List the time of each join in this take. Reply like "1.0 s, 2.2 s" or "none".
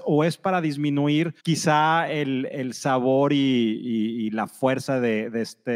1.4 s